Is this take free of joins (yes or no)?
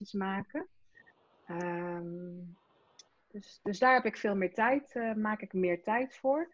yes